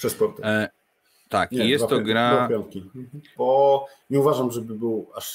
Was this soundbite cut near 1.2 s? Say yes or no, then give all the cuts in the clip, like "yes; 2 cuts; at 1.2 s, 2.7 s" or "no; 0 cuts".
no; 1 cut; at 3.4 s